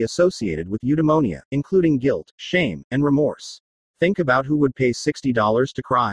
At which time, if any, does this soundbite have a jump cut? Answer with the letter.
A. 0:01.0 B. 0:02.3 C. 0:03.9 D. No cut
C